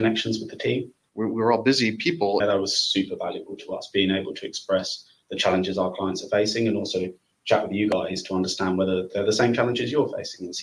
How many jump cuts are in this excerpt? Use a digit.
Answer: 2